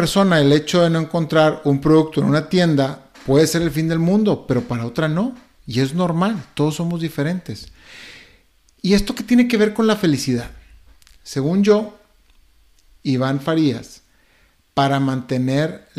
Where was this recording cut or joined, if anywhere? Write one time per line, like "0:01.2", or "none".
none